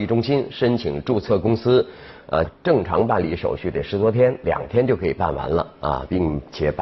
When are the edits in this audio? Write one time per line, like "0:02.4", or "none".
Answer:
0:02.4
0:04.4